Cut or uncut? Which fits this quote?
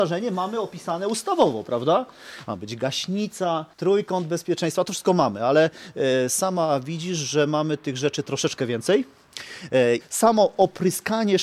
cut